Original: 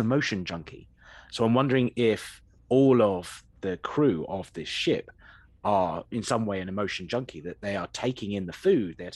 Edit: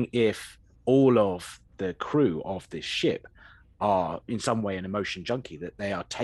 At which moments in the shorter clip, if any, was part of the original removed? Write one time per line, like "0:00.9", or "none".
none